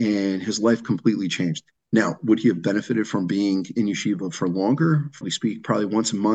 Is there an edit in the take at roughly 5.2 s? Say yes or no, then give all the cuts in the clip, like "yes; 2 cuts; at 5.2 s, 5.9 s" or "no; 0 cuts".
yes; 1 cut; at 5.2 s